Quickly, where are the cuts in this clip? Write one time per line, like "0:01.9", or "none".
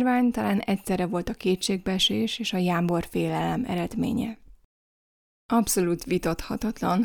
none